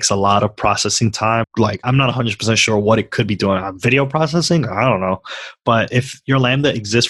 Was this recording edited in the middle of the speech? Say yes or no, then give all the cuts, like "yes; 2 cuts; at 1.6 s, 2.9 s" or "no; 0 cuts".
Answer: yes; 1 cut; at 1.4 s